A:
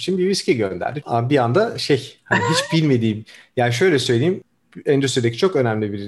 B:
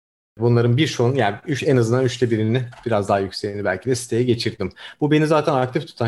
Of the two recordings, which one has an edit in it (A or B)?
A